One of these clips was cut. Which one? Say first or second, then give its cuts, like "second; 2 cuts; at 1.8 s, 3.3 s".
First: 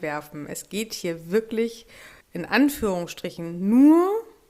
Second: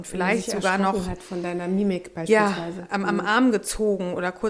first; 1 cut; at 2.2 s